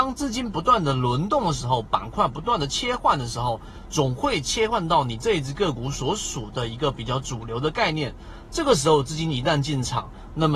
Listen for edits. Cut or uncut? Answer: uncut